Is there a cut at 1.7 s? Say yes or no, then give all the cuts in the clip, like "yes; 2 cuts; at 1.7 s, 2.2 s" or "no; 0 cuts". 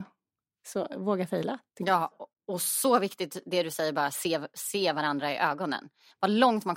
no; 0 cuts